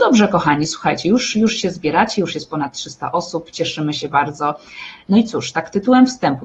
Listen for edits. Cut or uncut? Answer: uncut